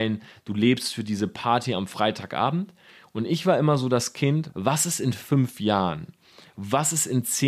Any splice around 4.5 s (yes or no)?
yes